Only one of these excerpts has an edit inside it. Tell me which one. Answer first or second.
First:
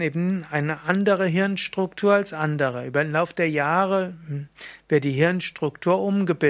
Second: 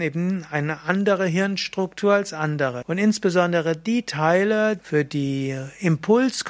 second